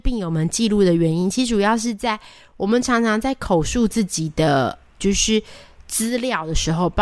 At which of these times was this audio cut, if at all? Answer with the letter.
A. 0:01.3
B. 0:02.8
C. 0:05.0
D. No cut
C